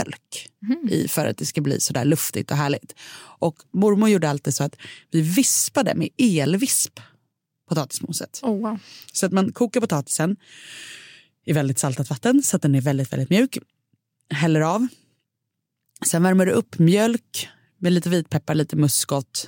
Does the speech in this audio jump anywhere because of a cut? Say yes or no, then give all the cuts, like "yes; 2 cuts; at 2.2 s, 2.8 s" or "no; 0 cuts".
no; 0 cuts